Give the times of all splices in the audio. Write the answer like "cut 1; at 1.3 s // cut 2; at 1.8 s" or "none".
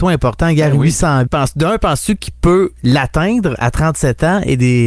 cut 1; at 1.3 s